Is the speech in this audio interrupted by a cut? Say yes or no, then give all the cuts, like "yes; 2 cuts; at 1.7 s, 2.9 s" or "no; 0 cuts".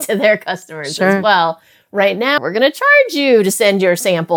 yes; 1 cut; at 2.4 s